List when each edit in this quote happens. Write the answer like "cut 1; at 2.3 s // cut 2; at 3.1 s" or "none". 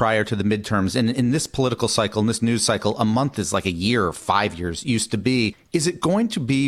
none